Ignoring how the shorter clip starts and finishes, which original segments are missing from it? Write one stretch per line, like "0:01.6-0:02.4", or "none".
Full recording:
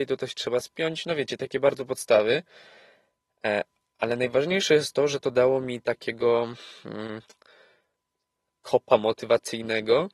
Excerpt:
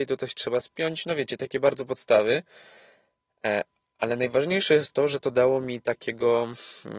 none

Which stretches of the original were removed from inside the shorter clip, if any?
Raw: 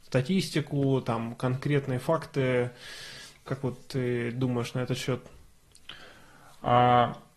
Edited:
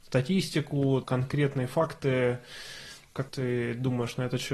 0:01.0-0:01.4
0:03.6-0:03.9

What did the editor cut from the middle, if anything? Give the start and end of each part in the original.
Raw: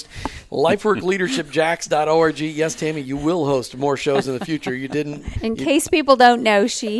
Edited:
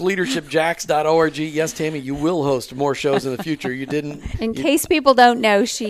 none

